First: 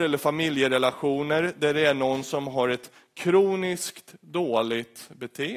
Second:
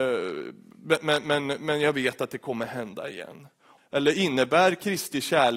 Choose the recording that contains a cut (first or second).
second